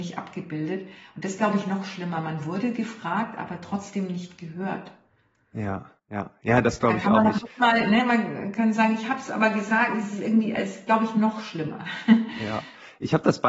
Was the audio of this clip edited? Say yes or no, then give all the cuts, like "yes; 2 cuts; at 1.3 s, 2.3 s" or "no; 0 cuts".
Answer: yes; 1 cut; at 6.0 s